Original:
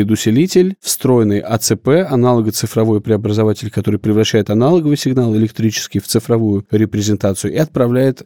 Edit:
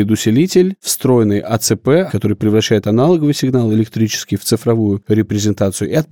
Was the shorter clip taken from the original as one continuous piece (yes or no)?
no